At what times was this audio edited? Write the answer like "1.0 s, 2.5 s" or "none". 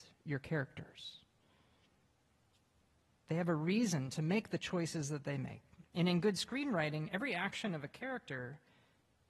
3.2 s